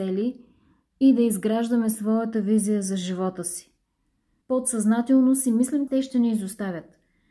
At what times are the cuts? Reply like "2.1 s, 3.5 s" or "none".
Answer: 4.4 s, 5.9 s